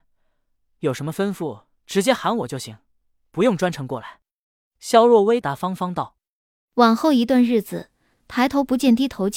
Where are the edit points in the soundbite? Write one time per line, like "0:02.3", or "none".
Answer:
0:05.4
0:08.2

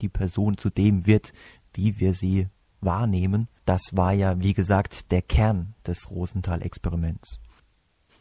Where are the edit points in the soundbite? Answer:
0:03.6

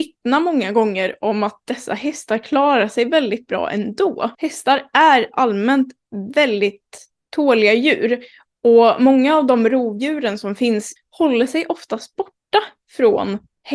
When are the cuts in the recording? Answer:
0:04.3
0:11.0

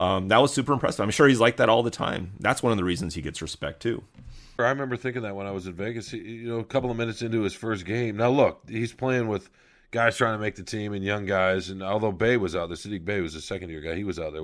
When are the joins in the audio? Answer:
0:04.6

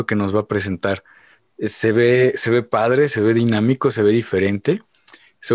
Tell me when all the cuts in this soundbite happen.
none

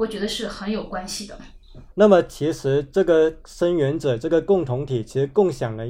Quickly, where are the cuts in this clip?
0:01.9

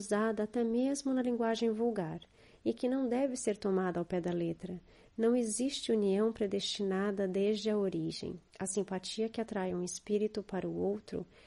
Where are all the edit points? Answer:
0:08.5

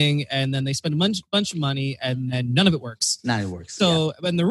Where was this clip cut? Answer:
none

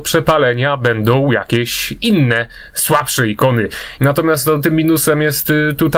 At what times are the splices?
0:04.0

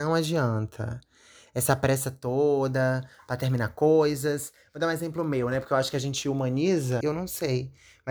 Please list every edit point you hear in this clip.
0:07.0

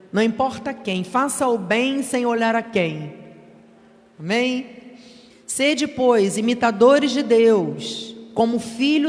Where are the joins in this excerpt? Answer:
0:05.3

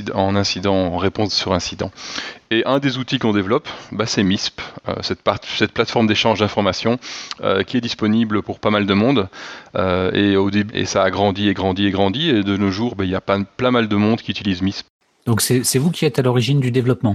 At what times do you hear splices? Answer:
0:10.7

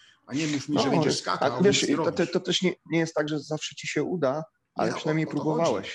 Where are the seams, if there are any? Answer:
none

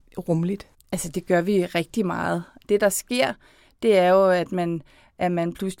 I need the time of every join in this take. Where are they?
0:02.6

